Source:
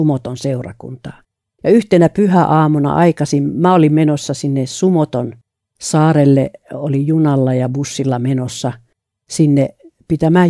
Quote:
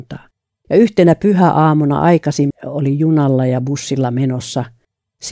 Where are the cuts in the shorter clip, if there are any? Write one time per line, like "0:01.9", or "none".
0:02.5